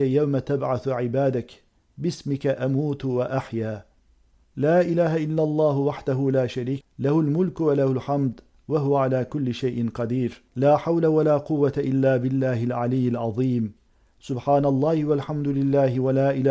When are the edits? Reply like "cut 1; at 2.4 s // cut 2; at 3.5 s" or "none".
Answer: cut 1; at 6.8 s // cut 2; at 10.5 s